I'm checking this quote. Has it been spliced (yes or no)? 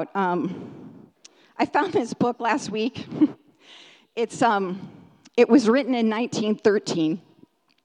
no